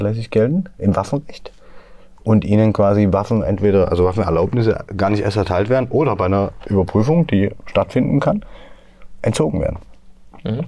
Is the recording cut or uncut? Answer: uncut